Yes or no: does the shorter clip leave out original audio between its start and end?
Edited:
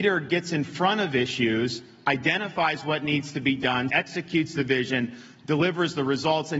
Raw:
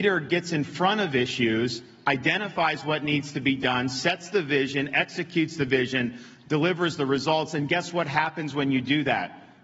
yes